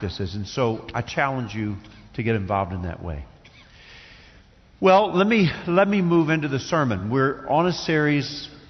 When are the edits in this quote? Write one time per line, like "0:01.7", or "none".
none